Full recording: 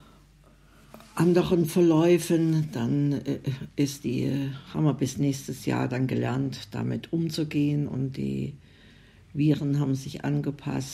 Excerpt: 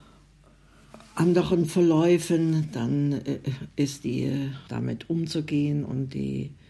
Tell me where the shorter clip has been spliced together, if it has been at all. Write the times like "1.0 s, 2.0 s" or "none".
4.7 s